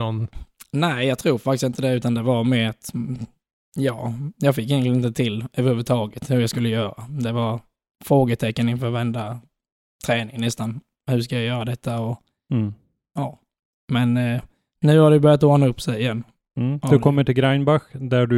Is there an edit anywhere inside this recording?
no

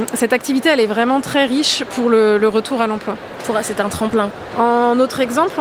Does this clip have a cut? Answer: yes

